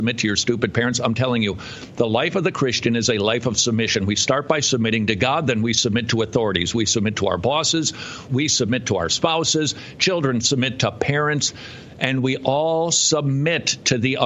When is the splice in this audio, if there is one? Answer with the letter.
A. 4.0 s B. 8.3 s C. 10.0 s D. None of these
B